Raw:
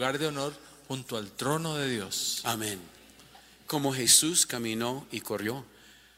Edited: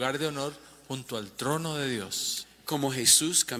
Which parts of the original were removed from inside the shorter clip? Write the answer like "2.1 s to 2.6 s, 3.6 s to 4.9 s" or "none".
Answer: 2.4 s to 3.4 s